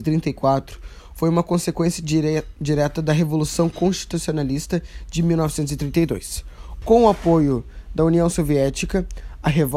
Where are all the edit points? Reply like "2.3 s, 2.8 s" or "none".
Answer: 6.8 s